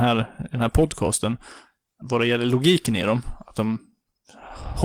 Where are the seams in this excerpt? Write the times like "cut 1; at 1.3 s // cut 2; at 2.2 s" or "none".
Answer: cut 1; at 2.0 s